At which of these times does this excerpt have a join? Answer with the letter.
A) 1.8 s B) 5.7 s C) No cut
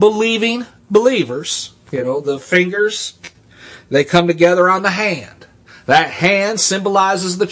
C